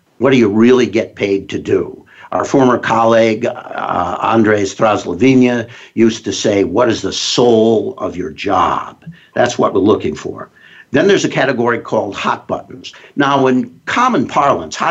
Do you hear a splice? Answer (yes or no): no